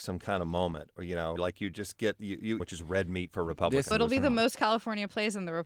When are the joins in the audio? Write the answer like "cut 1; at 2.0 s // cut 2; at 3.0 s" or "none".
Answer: cut 1; at 1.4 s // cut 2; at 2.6 s // cut 3; at 3.9 s